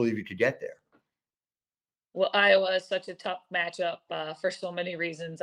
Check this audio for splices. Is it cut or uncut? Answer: uncut